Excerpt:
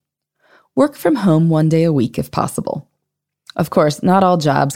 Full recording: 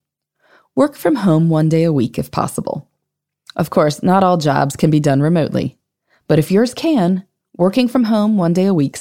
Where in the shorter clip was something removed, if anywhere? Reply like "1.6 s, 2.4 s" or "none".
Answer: none